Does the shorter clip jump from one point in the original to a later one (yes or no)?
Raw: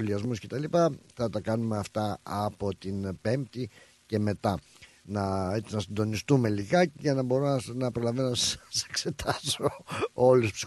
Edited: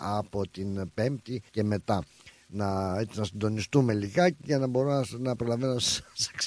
yes